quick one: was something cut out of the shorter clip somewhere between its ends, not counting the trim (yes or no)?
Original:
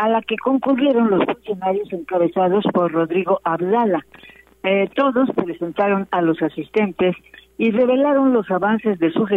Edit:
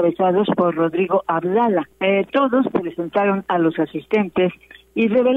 yes